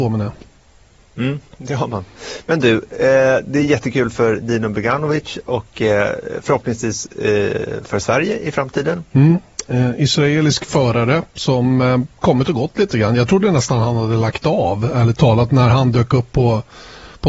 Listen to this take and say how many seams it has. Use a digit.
1